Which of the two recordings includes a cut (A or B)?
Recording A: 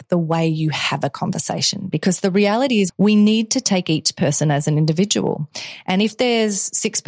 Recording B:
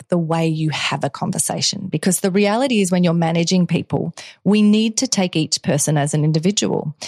A